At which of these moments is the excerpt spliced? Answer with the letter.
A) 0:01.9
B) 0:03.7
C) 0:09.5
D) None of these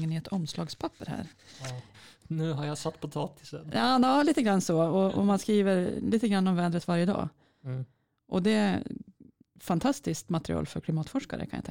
A